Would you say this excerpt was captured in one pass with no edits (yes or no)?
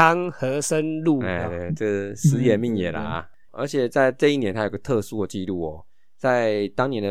no